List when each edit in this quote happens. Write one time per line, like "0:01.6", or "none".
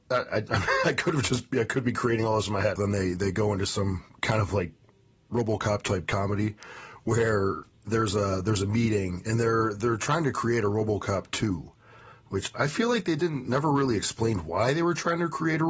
0:02.8